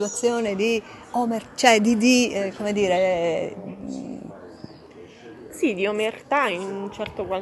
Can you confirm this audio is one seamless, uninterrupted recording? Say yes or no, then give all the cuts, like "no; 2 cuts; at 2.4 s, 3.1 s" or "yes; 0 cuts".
yes; 0 cuts